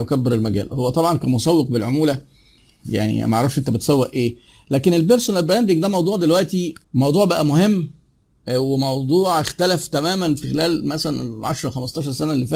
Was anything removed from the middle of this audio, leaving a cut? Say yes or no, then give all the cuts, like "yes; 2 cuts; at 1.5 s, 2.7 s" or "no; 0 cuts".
yes; 1 cut; at 6.8 s